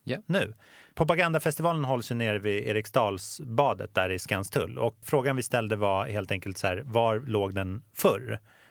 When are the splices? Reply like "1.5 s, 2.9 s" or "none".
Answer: 5.0 s